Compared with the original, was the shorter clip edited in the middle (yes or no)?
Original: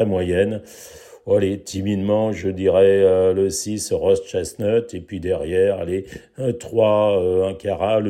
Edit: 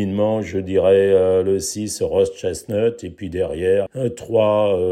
yes